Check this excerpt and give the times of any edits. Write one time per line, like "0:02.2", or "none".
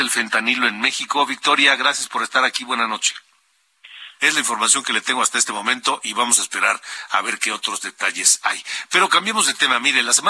0:04.2

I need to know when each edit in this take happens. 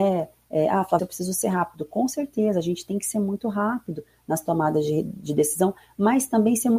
0:01.0

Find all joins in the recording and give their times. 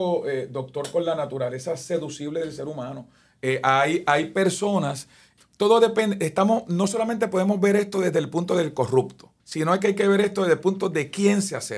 0:05.4
0:09.4

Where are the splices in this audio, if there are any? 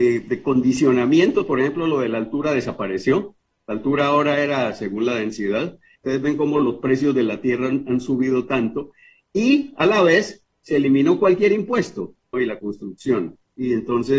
0:05.9
0:12.3

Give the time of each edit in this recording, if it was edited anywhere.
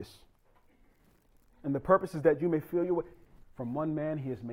0:03.4

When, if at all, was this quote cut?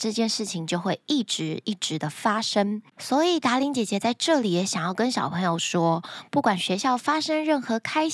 0:02.9

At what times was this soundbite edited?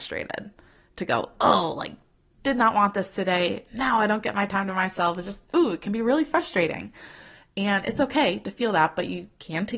none

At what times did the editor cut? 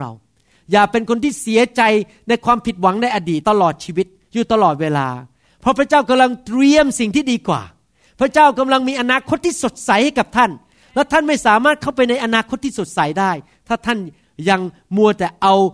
0:03.4

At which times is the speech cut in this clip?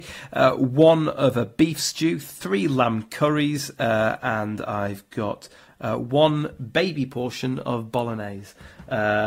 none

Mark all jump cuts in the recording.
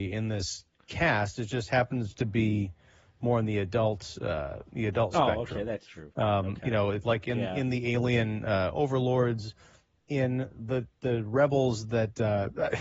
none

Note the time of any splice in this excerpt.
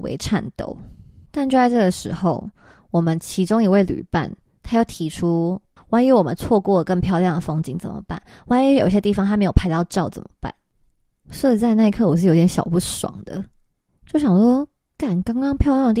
0:05.8

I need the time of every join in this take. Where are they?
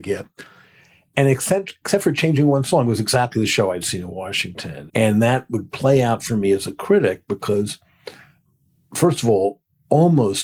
0:04.9

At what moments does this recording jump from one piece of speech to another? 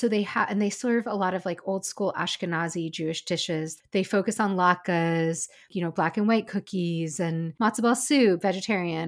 0:05.7

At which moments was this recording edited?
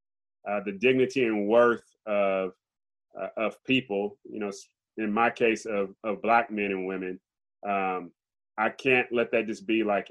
0:04.9

